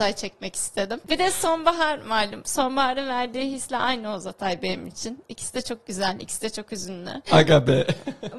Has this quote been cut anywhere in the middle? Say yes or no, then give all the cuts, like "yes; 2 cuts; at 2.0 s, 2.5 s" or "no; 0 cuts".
yes; 1 cut; at 7.3 s